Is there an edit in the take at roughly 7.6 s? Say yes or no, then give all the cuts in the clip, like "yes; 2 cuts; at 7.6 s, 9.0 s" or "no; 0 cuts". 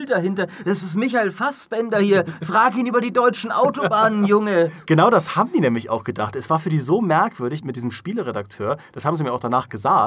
yes; 1 cut; at 7.6 s